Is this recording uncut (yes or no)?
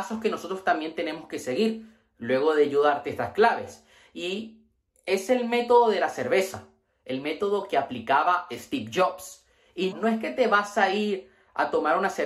no